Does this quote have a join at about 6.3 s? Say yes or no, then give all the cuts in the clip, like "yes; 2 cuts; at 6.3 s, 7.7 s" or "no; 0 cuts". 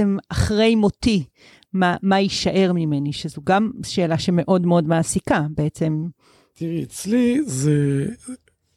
no; 0 cuts